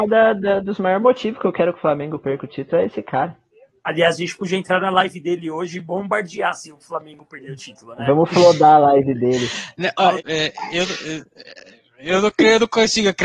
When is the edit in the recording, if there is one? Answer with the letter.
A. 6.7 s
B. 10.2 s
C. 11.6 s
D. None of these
B